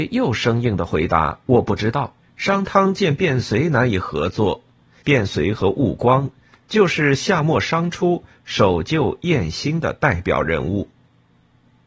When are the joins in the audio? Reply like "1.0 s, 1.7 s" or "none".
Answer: 2.2 s, 5.0 s